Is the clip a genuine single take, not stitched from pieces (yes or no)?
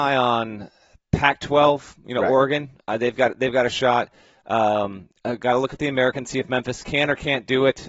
yes